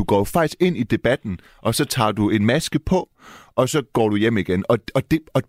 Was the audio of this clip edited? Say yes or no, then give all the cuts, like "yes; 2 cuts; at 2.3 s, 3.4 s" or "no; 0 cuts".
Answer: no; 0 cuts